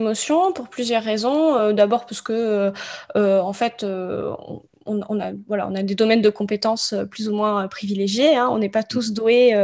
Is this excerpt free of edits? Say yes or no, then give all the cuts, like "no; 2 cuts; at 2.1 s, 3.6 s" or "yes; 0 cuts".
yes; 0 cuts